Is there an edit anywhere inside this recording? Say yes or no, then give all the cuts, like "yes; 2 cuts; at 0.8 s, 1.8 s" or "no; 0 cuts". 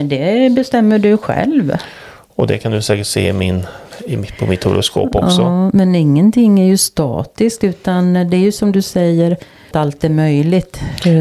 no; 0 cuts